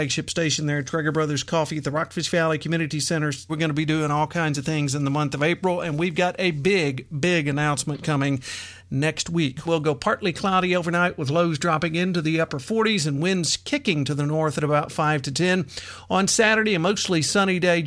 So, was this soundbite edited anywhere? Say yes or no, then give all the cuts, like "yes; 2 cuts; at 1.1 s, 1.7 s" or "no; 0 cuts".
yes; 2 cuts; at 3.5 s, 9.7 s